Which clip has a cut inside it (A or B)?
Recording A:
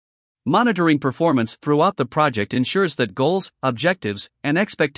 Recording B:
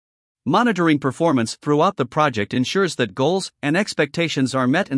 B